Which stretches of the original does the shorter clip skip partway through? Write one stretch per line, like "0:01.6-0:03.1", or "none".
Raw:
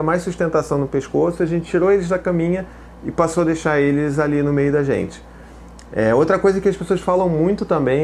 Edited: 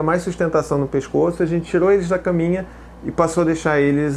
none